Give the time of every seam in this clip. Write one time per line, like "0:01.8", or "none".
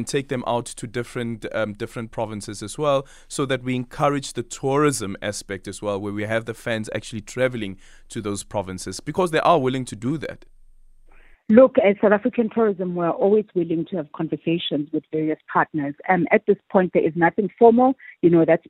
none